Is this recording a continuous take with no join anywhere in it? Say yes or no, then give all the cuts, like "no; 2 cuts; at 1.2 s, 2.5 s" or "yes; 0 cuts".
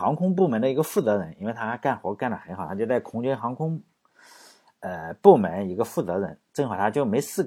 yes; 0 cuts